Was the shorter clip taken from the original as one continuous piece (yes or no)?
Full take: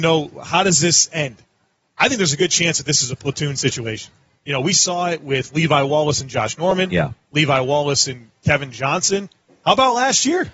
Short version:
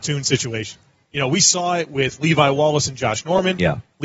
yes